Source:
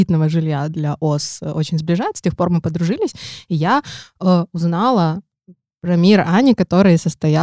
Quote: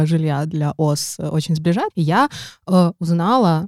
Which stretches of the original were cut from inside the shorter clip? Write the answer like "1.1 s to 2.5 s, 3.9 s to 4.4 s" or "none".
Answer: 2.1 s to 3.4 s